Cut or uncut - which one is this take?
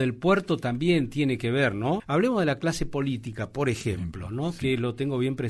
cut